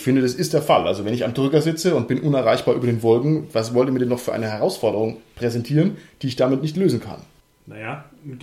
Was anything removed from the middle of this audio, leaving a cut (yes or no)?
no